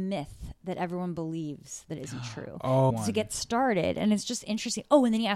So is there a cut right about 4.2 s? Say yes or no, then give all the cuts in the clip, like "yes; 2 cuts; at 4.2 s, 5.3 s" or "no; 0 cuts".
no; 1 cut; at 2.9 s